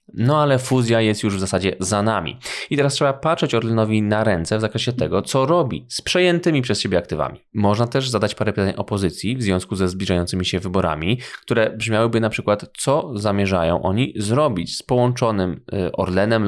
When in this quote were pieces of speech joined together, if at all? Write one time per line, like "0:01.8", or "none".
none